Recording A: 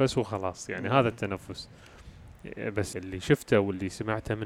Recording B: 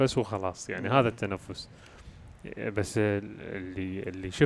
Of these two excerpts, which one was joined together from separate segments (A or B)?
A